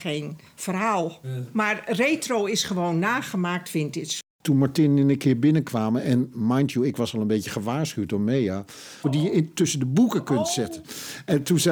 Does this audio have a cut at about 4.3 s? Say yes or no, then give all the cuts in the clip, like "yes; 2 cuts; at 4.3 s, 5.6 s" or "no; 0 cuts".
yes; 2 cuts; at 4.3 s, 9.0 s